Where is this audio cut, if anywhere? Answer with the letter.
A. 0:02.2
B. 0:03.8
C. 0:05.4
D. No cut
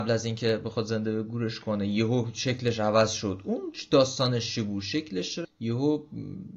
C